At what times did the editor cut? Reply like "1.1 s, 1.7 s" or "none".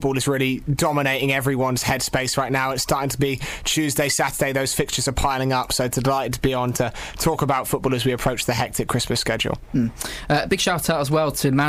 none